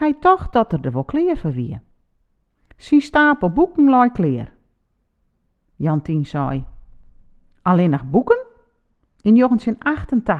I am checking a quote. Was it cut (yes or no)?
yes